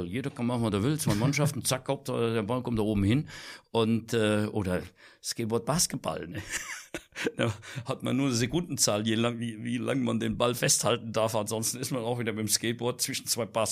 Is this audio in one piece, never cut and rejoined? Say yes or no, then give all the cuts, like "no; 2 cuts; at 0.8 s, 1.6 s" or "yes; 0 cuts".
yes; 0 cuts